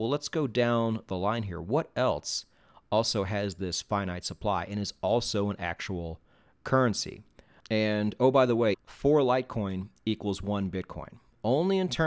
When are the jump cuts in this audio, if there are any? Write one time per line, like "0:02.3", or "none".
0:07.6
0:08.7